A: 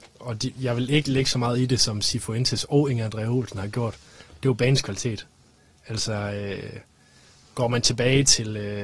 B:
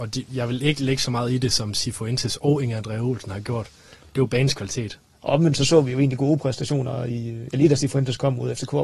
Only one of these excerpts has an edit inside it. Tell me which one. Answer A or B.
B